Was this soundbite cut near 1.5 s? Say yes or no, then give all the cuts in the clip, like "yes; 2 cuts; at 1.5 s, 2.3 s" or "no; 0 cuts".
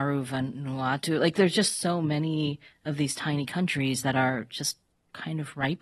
no; 0 cuts